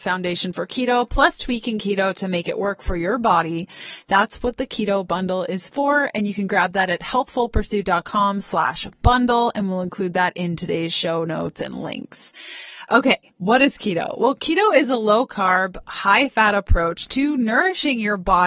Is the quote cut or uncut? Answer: uncut